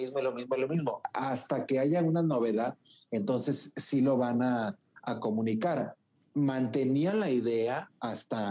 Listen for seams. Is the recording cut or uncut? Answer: uncut